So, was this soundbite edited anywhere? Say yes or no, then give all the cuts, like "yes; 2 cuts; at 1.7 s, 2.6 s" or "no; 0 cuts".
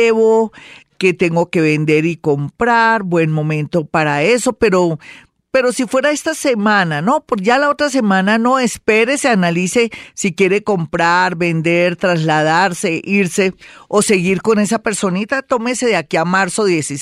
no; 0 cuts